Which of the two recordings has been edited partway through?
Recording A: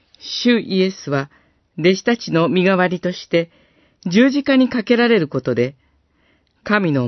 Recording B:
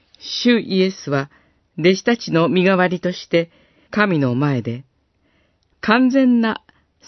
B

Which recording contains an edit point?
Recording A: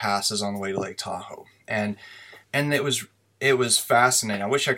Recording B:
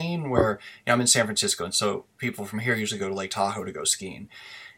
A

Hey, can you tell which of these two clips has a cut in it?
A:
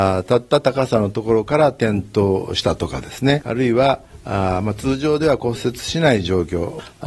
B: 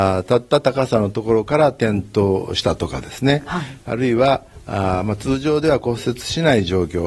A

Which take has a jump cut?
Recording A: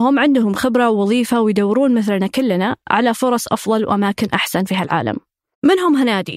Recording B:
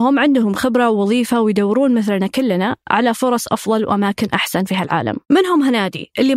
B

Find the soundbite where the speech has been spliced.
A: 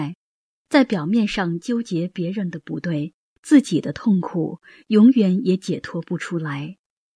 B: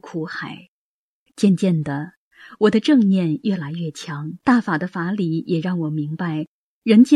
B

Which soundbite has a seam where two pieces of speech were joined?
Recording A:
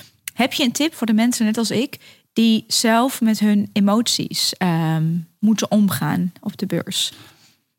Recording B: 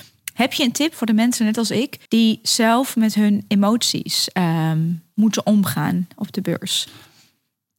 B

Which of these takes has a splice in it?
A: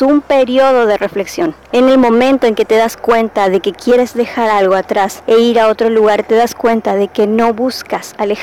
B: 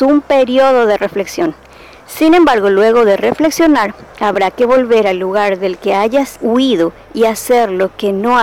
A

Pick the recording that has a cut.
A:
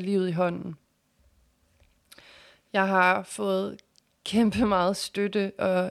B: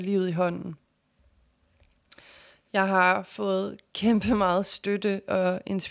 B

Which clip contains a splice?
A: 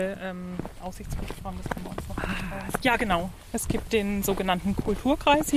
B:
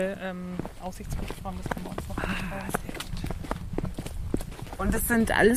A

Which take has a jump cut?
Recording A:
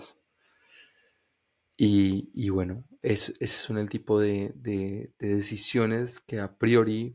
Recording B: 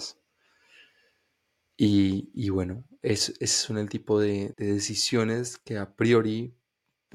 B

